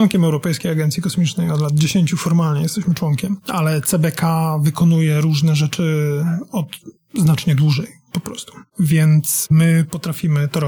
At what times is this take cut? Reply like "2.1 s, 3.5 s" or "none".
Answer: none